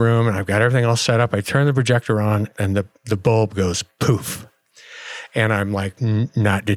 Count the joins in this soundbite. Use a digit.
0